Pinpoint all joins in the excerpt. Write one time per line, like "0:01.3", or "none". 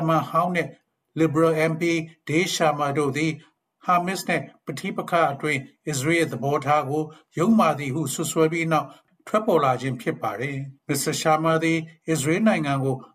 0:10.8